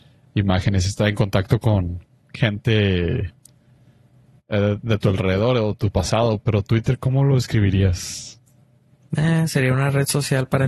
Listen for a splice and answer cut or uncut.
cut